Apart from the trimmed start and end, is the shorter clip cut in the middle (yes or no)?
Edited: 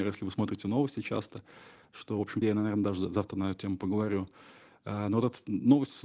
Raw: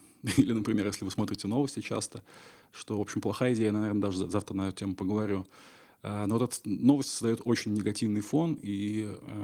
yes